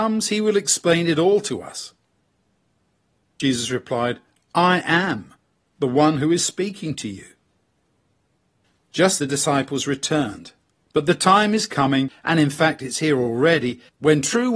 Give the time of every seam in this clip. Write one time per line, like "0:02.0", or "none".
0:09.2
0:10.8